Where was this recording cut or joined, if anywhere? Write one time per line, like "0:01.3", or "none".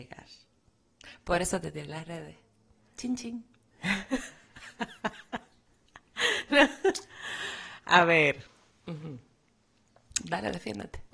none